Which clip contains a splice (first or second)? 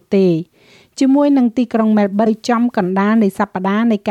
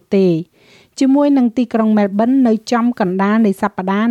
first